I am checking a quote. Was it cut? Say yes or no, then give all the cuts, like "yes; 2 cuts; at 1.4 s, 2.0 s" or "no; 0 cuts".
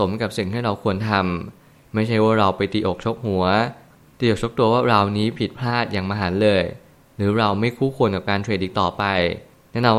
no; 0 cuts